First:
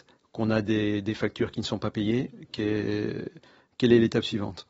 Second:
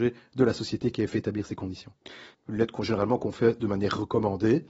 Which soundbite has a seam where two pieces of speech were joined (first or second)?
second